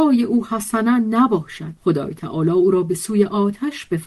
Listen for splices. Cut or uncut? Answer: cut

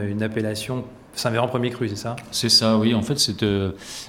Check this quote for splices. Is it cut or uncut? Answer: cut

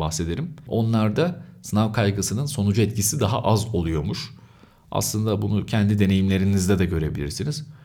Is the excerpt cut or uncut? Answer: uncut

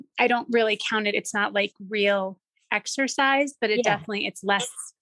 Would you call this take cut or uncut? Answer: uncut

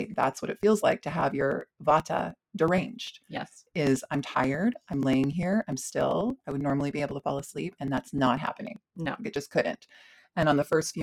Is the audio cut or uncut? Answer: uncut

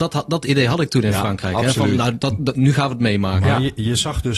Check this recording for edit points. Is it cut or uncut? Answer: uncut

